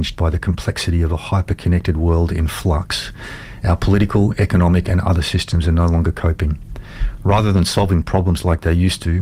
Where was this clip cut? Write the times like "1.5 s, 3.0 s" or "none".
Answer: none